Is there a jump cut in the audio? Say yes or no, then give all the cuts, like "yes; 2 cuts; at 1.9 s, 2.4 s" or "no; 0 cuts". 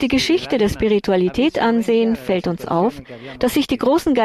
no; 0 cuts